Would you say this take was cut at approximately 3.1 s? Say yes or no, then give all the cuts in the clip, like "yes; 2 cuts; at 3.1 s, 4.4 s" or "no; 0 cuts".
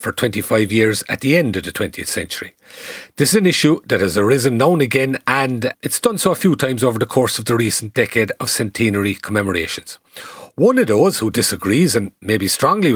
no; 1 cut; at 5.7 s